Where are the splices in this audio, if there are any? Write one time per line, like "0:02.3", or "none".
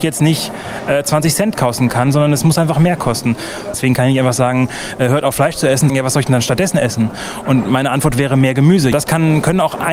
0:05.9
0:08.9

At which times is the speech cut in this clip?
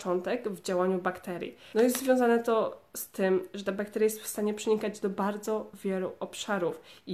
0:01.7

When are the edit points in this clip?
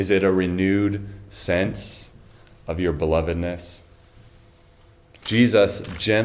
0:05.2

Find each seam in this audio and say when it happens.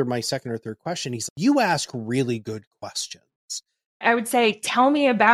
0:03.8

